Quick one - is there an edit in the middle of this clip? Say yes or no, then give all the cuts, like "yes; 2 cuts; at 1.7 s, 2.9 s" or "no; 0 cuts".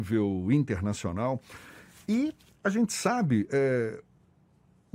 no; 0 cuts